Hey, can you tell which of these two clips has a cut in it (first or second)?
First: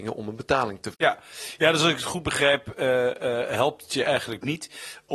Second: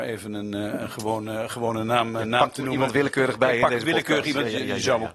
first